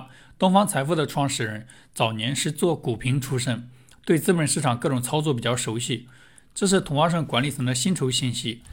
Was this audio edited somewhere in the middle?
no; 0 cuts

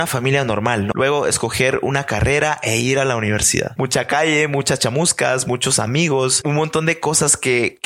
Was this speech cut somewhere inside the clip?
yes; 3 cuts; at 0.9 s, 3.8 s, 6.4 s

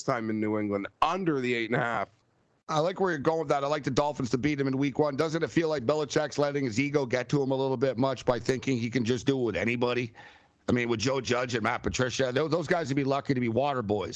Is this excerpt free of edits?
yes; 0 cuts

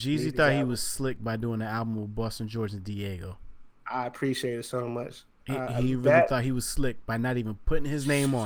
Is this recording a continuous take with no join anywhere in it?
yes; 0 cuts

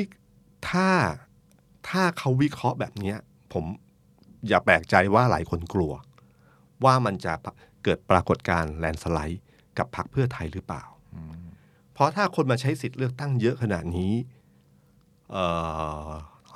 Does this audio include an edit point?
no; 0 cuts

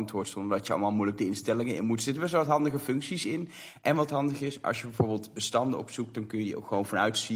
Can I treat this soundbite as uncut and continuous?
yes; 0 cuts

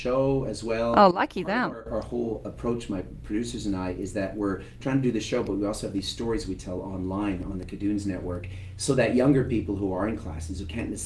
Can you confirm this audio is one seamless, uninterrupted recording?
yes; 0 cuts

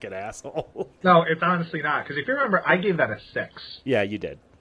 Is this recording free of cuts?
no; 1 cut; at 1.0 s

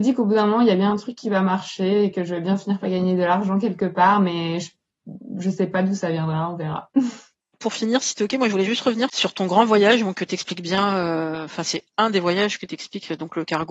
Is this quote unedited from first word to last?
yes; 0 cuts

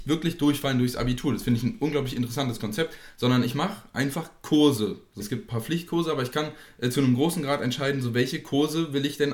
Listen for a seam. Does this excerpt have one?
yes; 1 cut; at 5.2 s

